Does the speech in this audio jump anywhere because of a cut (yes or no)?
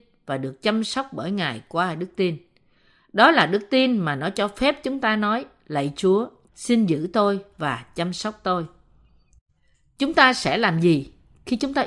yes